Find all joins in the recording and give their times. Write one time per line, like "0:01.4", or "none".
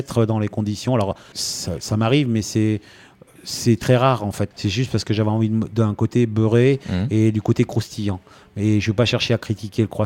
0:01.3
0:04.5